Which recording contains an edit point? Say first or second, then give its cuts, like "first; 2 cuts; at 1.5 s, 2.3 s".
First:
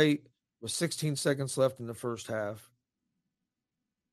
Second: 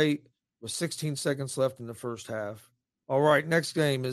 second; 1 cut; at 3.0 s